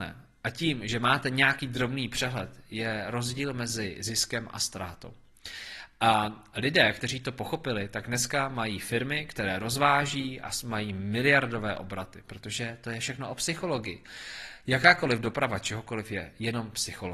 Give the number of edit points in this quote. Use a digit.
0